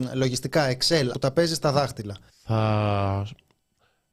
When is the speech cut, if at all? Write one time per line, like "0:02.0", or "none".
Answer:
0:01.1
0:02.3